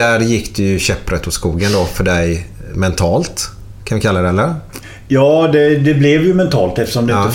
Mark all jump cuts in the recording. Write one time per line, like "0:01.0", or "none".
none